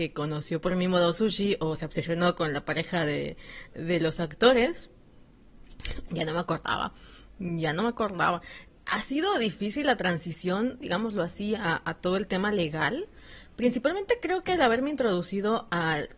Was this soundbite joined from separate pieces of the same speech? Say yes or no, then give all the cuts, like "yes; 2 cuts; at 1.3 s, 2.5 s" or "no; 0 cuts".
yes; 2 cuts; at 6.1 s, 10.8 s